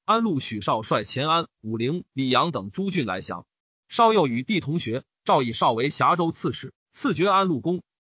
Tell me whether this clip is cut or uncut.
uncut